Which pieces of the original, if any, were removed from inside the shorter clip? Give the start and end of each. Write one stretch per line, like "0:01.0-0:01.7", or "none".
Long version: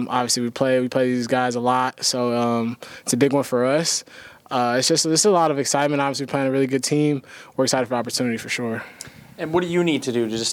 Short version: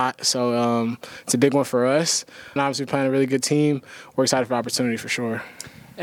0:04.3-0:06.0